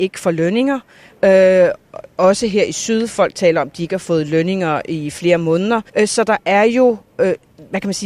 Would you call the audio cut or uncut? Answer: cut